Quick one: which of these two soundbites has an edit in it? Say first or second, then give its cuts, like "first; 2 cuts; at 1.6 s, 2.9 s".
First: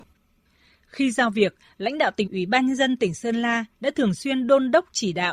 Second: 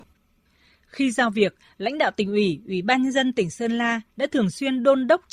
first; 1 cut; at 2.3 s